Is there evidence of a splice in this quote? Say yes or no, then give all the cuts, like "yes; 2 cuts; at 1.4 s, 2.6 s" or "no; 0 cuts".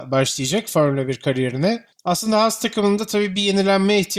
yes; 1 cut; at 1.9 s